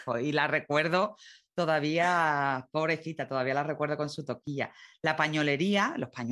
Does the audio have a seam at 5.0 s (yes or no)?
no